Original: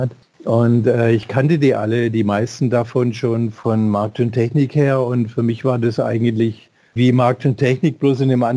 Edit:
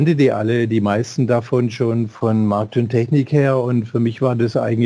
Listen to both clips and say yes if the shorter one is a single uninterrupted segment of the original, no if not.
yes